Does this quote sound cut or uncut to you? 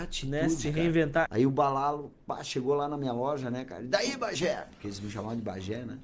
cut